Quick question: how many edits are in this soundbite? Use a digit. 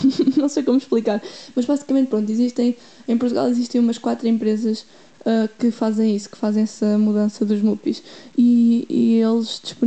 0